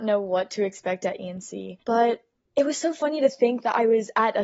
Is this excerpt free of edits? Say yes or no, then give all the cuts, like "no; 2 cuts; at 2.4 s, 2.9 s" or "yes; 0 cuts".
no; 1 cut; at 1.8 s